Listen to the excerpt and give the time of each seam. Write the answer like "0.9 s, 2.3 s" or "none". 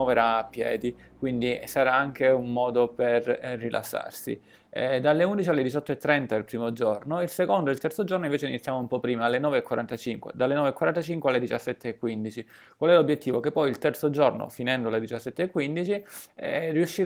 none